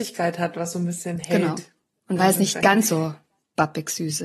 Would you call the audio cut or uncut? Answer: uncut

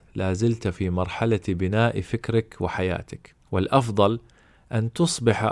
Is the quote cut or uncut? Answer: cut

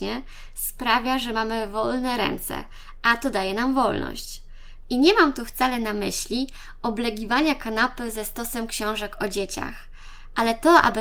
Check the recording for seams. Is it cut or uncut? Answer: cut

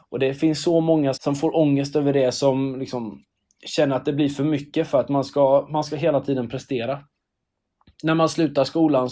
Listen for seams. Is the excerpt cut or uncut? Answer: cut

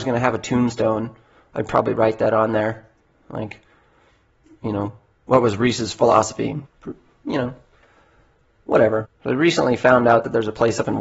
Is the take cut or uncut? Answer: cut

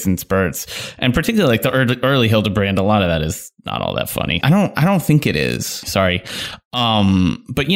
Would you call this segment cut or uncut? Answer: cut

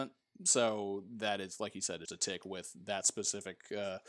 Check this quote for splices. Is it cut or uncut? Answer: cut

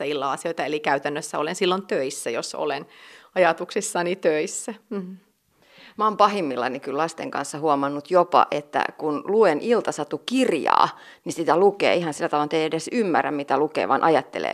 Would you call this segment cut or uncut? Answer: uncut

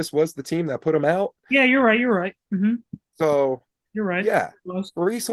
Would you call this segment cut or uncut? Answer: uncut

